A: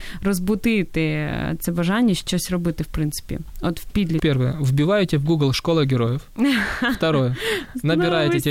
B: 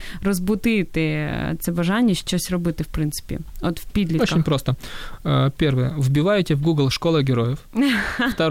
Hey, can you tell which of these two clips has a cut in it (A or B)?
A